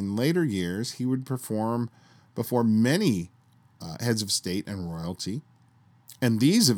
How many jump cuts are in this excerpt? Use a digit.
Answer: 0